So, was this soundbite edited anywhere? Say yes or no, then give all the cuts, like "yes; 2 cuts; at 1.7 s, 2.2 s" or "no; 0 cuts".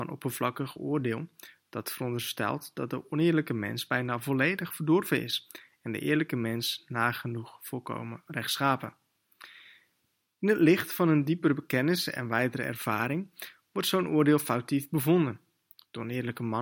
no; 0 cuts